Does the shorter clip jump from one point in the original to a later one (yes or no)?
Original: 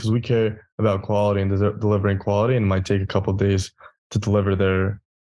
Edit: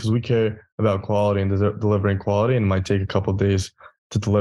no